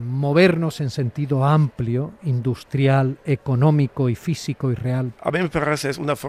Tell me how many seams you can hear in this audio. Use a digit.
1